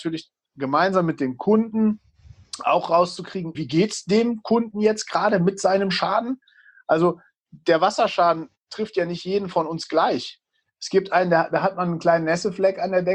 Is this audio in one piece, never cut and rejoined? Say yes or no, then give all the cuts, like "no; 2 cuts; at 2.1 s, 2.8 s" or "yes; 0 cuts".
no; 1 cut; at 3.5 s